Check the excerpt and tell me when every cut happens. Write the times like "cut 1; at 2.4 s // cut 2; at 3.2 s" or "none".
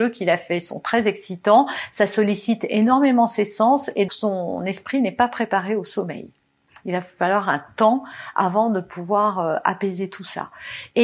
cut 1; at 4.1 s

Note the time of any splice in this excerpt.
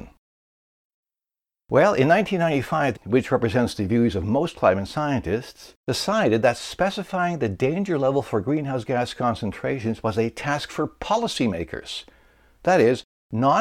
cut 1; at 2.9 s // cut 2; at 5.8 s

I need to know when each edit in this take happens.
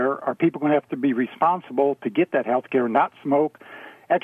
none

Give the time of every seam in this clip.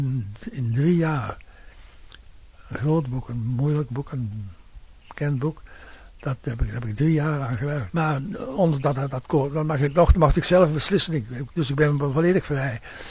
cut 1; at 7.9 s

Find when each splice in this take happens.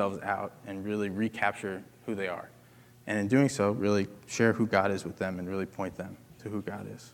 none

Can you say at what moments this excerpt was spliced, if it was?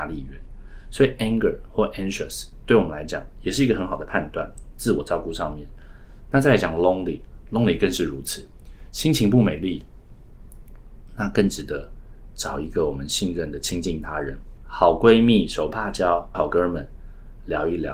cut 1; at 14.6 s // cut 2; at 16.3 s

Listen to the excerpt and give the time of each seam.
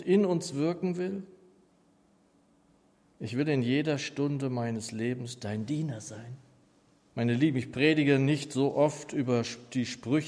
cut 1; at 3.1 s // cut 2; at 7.1 s

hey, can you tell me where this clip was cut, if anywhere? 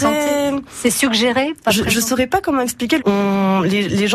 cut 1; at 3.0 s

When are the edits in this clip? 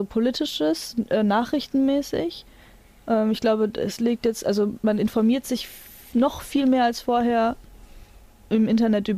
none

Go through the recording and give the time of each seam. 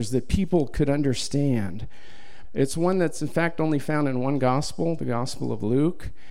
cut 1; at 2.4 s

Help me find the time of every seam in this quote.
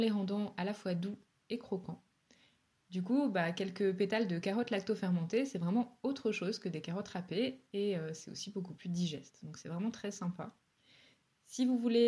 none

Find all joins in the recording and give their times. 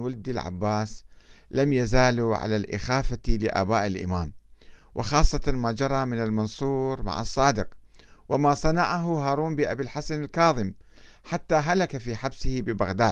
none

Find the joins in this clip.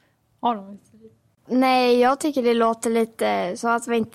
cut 1; at 1.5 s

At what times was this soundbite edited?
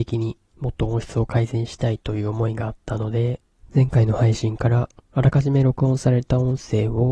none

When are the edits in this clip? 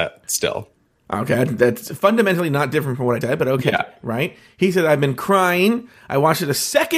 cut 1; at 3.2 s

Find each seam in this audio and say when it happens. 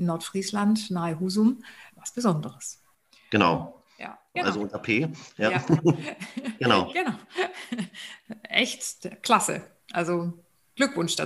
cut 1; at 1.9 s // cut 2; at 4.3 s

